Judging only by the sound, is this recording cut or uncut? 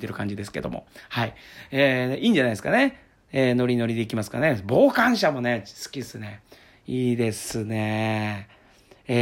uncut